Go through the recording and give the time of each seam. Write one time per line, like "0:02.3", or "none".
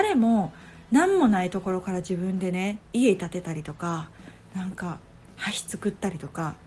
0:02.8

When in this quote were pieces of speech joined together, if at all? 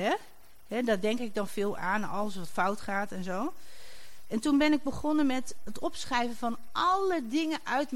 0:05.7

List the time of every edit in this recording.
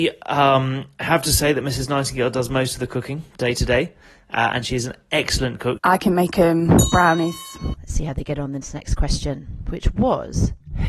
0:05.8
0:07.7

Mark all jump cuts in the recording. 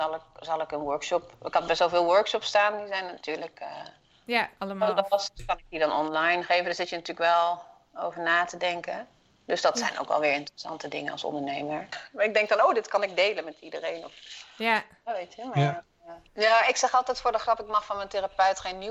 0:11.9
0:16.3

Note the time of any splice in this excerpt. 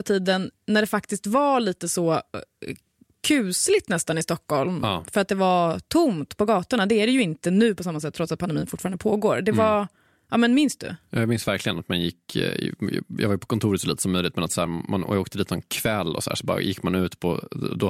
none

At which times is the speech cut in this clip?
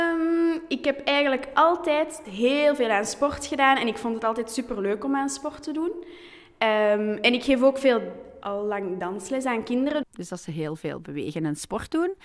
0:02.2
0:10.0

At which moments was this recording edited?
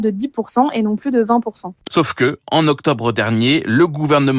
0:01.9

